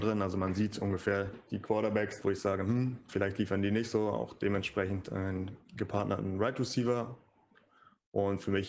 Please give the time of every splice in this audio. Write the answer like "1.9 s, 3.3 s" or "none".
2.2 s, 5.6 s